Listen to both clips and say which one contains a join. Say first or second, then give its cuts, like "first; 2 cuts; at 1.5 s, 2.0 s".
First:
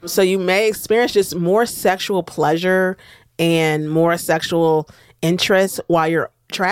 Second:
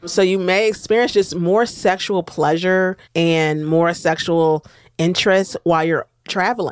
second; 1 cut; at 3.0 s